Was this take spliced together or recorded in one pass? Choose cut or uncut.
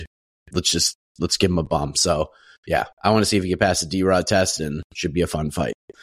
uncut